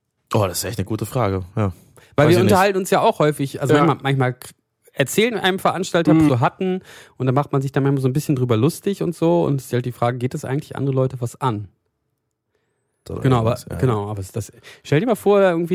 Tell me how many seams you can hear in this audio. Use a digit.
2